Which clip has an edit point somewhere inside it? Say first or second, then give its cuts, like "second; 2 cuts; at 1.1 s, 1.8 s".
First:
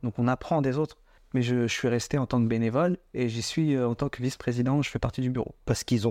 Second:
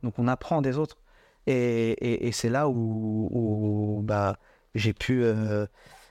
first; 1 cut; at 1.2 s